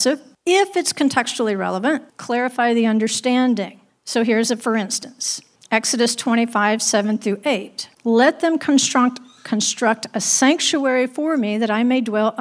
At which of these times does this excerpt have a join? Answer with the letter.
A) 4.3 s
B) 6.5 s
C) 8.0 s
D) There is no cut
C